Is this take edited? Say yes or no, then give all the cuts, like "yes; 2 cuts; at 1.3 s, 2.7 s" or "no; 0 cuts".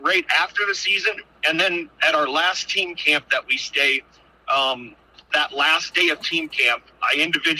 no; 0 cuts